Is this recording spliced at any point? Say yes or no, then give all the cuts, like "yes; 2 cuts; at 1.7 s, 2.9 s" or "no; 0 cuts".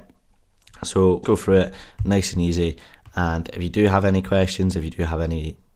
yes; 1 cut; at 1.2 s